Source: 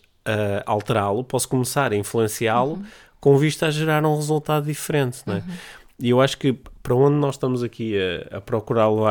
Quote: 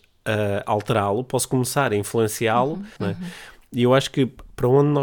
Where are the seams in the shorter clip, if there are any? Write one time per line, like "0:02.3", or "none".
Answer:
0:03.0